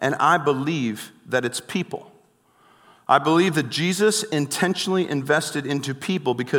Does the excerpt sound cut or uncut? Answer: uncut